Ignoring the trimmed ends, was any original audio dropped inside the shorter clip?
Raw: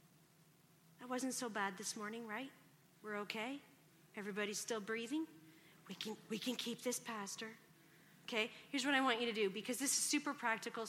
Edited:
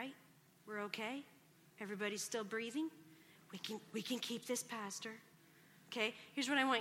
no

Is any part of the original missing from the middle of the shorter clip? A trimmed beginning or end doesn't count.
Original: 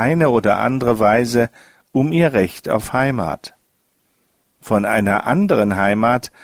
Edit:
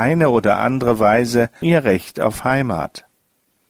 yes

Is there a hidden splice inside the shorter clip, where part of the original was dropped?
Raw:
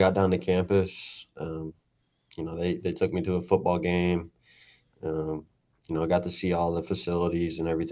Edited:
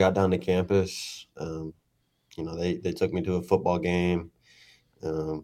no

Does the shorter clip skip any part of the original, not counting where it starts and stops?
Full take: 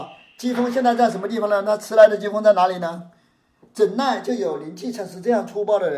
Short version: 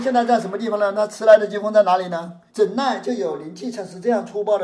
yes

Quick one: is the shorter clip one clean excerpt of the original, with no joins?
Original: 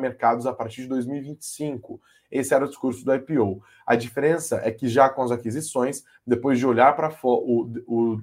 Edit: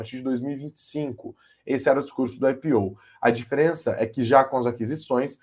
yes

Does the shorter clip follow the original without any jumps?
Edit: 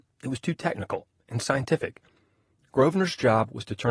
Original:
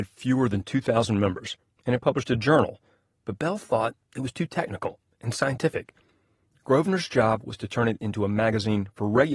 yes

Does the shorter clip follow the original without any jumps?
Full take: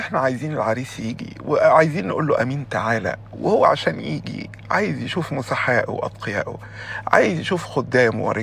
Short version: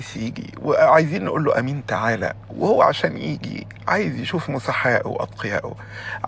yes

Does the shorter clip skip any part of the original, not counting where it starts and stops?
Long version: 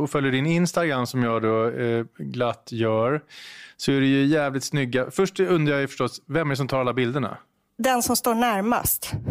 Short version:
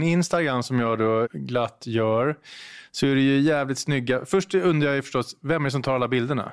yes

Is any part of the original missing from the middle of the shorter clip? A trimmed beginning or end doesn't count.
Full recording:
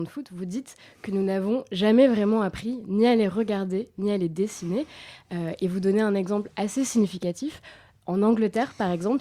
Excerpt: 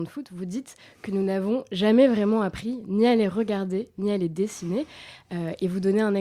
no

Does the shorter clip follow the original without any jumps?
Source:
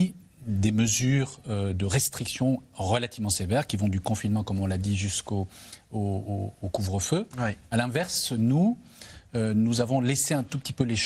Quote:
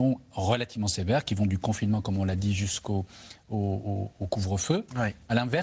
yes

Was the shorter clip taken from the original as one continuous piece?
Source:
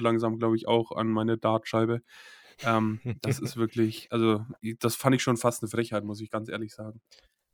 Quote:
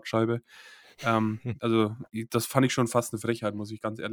no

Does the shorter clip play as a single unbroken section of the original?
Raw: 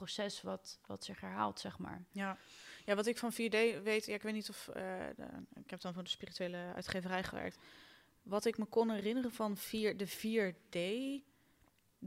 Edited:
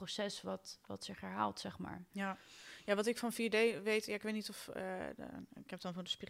yes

